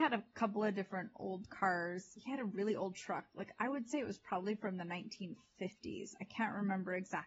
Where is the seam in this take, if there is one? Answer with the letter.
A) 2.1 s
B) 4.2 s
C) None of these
C